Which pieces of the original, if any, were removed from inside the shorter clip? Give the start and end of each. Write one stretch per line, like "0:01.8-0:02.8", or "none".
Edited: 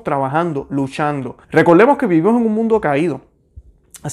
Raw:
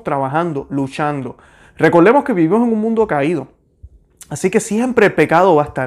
0:01.4-0:01.7